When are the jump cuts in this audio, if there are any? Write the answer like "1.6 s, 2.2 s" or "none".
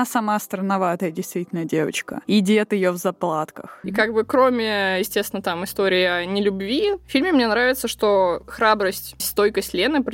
3.8 s, 9.2 s